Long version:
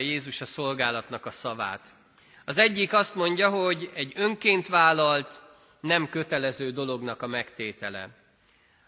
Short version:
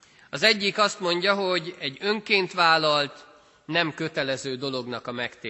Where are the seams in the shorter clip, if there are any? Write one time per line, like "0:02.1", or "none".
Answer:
none